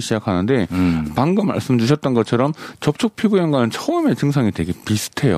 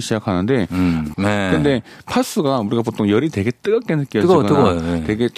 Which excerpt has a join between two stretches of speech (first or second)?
second